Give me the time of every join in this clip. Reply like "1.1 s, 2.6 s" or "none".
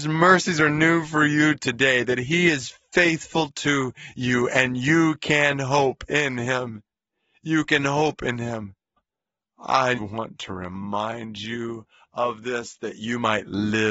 9.0 s, 10.0 s